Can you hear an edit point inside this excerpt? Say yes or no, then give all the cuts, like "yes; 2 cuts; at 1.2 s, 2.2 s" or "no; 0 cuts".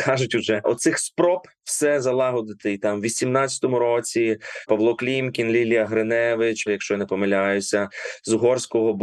yes; 2 cuts; at 4.6 s, 6.7 s